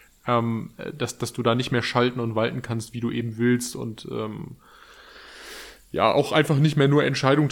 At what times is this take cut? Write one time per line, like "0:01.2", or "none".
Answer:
none